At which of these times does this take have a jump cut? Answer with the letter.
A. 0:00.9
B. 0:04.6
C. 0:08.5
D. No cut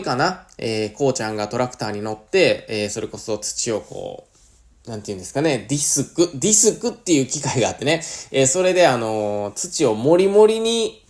D